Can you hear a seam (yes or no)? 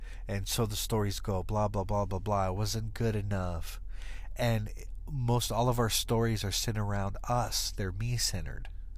no